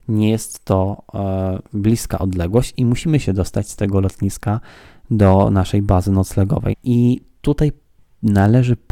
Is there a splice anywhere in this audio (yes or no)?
yes